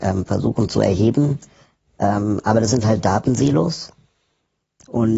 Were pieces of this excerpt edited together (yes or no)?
no